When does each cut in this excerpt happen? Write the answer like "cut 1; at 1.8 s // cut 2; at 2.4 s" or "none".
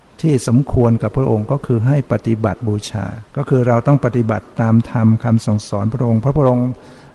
cut 1; at 3.3 s